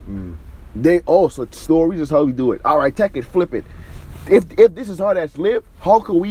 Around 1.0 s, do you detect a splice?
no; 0 cuts

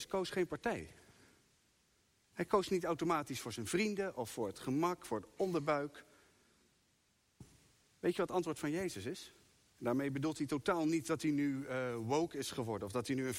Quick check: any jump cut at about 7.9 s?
no; 1 cut; at 9.7 s

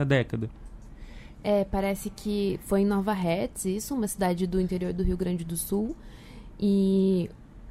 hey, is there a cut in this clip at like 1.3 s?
yes; 1 cut; at 1.3 s

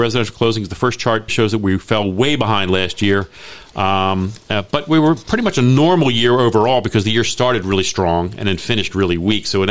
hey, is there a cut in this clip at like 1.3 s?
yes; 1 cut; at 1.3 s

